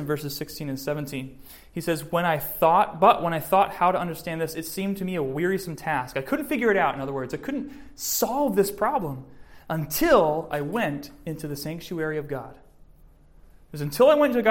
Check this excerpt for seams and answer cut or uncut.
uncut